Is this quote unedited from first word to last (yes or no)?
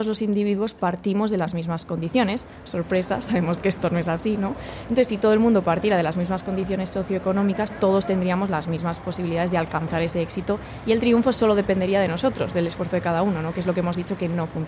yes